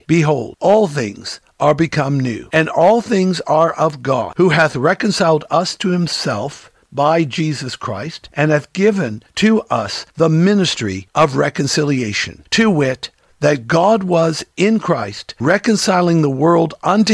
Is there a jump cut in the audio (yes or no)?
no